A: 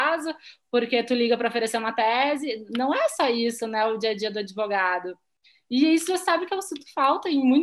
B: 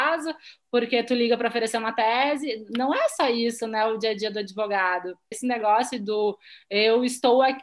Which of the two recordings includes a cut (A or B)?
B